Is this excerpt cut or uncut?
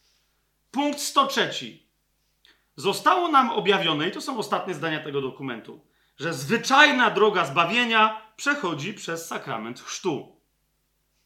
uncut